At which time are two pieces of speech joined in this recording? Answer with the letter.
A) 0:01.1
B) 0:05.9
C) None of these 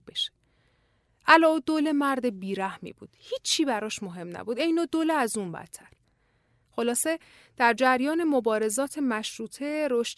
C